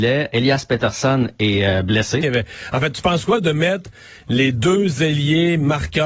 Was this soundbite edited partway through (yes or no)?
yes